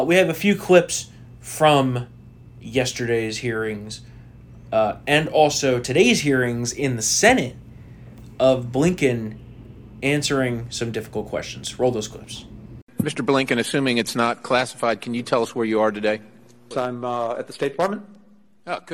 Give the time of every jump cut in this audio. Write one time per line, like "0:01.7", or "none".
0:16.7